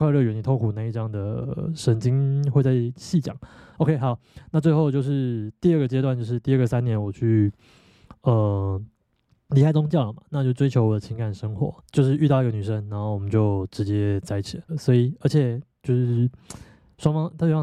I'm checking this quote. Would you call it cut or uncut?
cut